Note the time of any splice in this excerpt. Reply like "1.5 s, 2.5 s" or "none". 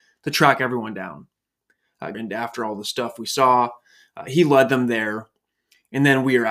2.1 s